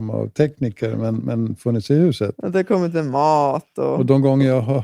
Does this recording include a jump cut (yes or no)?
no